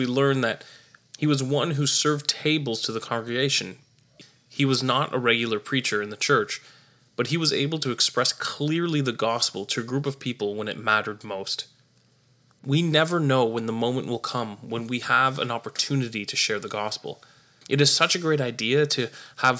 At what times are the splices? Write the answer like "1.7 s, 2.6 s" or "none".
17.6 s